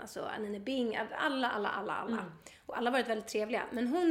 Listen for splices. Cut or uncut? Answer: uncut